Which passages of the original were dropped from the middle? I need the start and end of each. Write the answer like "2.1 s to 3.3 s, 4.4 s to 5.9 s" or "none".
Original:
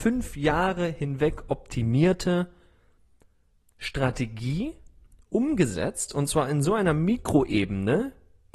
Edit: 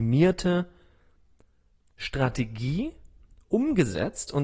none